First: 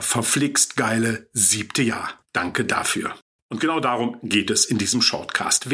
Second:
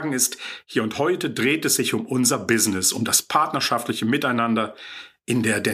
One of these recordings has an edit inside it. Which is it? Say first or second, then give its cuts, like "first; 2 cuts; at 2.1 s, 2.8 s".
first; 1 cut; at 2.2 s